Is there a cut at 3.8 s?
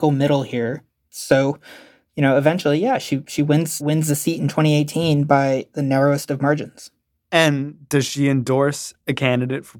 yes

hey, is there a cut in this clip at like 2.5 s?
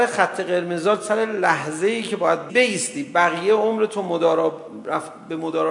yes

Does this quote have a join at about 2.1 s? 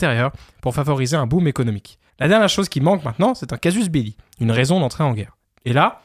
yes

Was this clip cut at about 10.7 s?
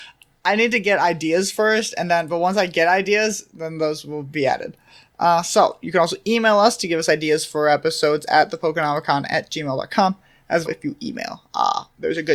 yes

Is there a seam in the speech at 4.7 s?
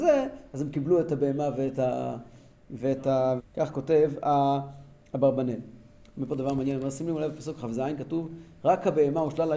no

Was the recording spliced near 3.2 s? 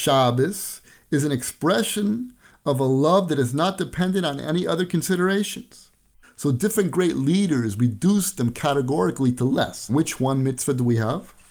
no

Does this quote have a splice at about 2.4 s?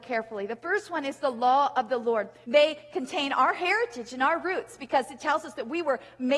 yes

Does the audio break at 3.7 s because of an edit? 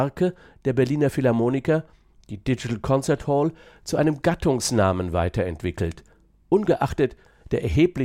no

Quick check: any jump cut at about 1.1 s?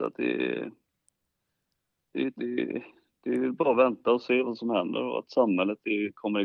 no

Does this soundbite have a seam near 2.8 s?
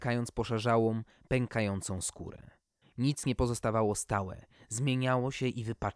yes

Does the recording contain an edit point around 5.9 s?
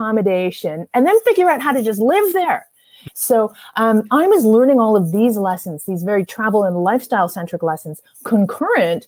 no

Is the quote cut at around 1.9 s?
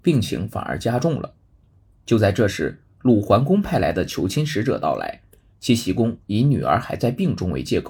no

